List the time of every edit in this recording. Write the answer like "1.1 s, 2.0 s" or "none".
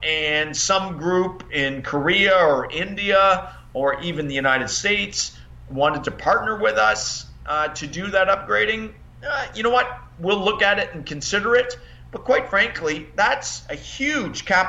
none